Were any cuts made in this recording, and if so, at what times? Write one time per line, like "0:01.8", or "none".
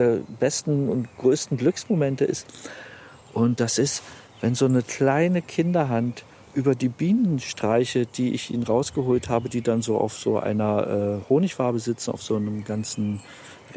none